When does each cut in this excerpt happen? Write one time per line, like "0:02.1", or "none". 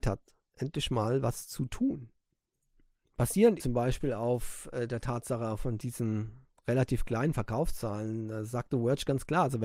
0:03.6